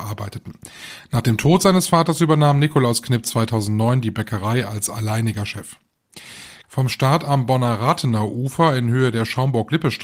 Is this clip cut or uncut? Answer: cut